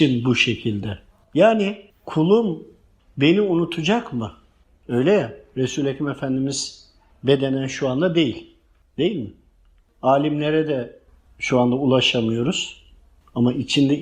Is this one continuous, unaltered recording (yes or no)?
yes